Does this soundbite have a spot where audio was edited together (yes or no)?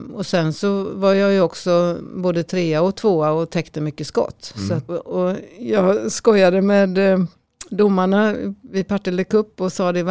yes